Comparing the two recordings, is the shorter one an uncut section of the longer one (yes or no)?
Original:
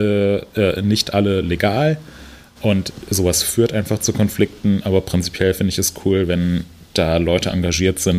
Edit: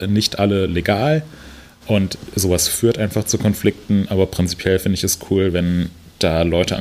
yes